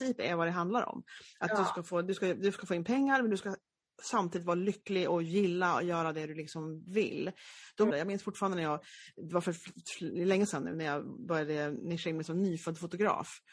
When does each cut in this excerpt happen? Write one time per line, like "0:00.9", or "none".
0:07.9

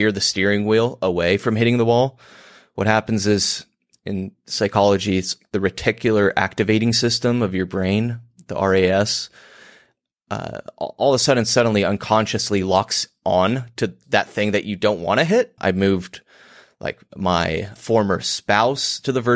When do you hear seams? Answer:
0:14.0
0:15.6
0:17.8

